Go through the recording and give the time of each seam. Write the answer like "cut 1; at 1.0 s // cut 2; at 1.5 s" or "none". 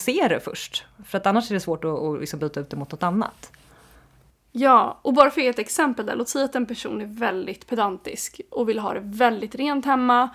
none